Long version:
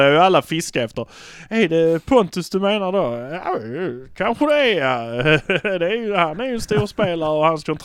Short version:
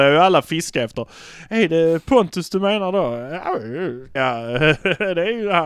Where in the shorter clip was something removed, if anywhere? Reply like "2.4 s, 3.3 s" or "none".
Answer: 4.2 s